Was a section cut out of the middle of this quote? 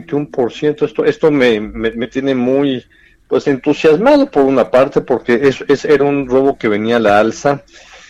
no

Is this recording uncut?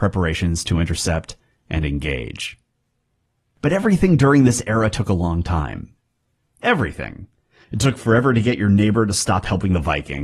no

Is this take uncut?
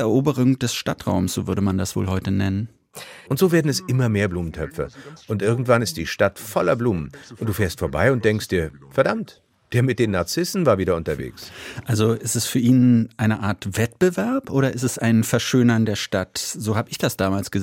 no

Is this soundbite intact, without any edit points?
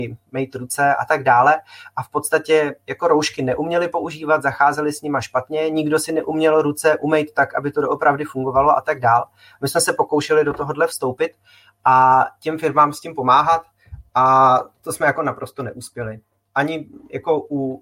yes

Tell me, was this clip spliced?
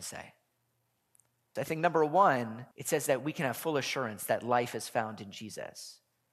yes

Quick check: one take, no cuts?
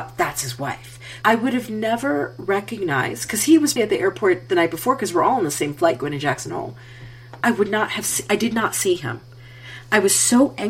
no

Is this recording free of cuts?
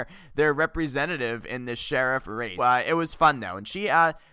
no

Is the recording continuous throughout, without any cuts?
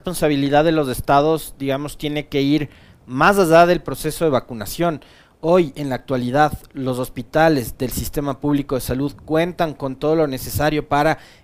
yes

